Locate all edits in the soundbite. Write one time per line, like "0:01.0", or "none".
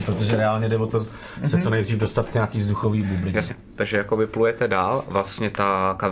none